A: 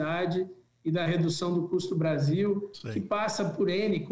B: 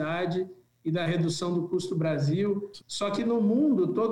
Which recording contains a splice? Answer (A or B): B